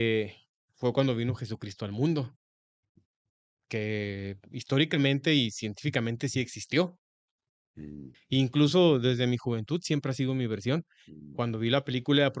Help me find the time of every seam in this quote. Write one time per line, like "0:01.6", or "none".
0:08.1